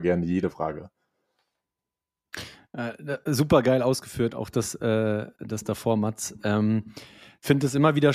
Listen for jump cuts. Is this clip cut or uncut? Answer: uncut